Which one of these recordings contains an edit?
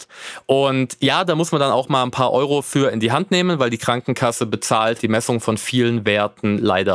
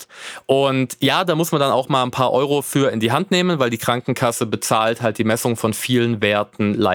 first; 1 cut; at 5.0 s

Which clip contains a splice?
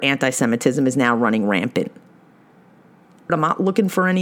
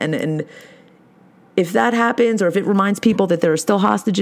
first; 1 cut; at 3.3 s

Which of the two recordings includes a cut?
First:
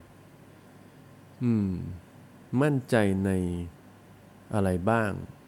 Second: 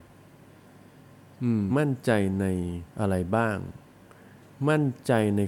second; 2 cuts; at 1.7 s, 2.9 s

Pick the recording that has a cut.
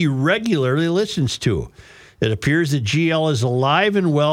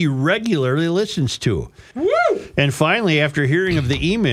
second; 1 cut; at 1.9 s

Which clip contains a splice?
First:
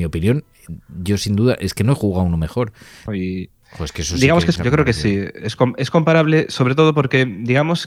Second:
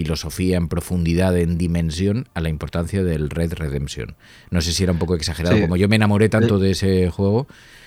first; 2 cuts; at 3.1 s, 4.6 s

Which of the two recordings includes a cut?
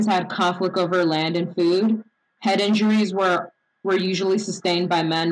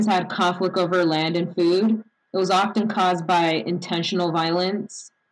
first; 1 cut; at 2.2 s

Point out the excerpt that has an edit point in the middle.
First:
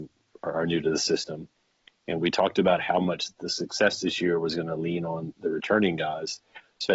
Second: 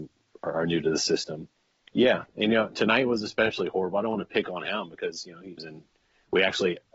second; 2 cuts; at 1.9 s, 5.6 s

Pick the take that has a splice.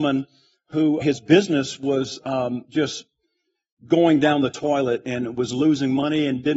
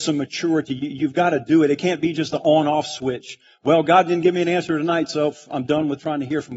first; 1 cut; at 1.0 s

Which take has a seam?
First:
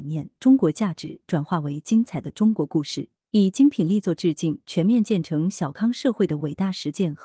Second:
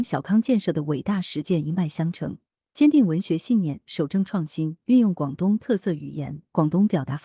first; 1 cut; at 3.2 s

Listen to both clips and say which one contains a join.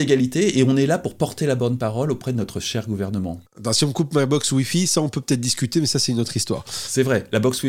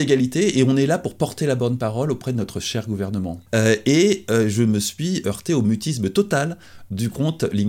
second; 1 cut; at 3.5 s

